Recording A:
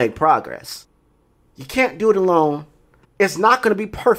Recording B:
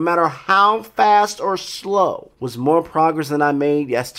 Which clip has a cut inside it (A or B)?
A